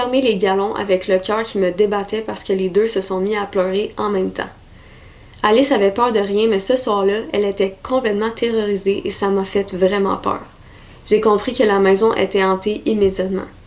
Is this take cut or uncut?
uncut